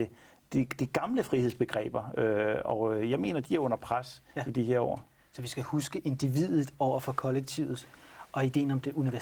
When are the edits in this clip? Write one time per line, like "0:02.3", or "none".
none

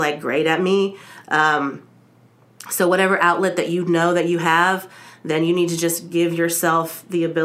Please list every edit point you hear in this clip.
none

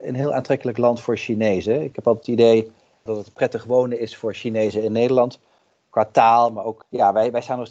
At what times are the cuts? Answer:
0:03.1

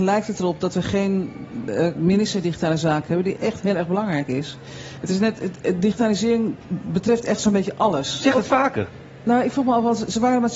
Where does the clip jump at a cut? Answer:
0:03.3
0:08.2

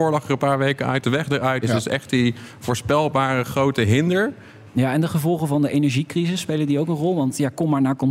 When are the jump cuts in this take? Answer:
0:01.6
0:04.7

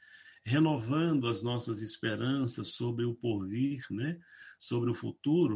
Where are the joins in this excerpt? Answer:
none

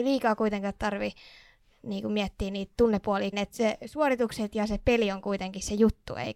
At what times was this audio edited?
0:03.3

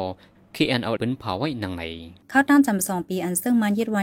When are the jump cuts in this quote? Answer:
0:01.0
0:02.2

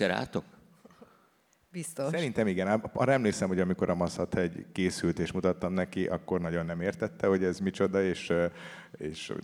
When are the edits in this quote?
none

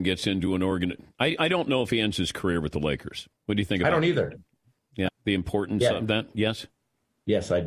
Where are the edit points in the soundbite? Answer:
0:03.4
0:05.1

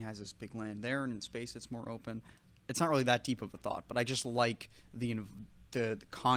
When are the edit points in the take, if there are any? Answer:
none

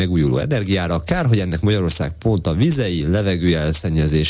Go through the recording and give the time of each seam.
none

